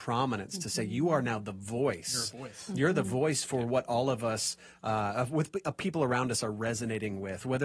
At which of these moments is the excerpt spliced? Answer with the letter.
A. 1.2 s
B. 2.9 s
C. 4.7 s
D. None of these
D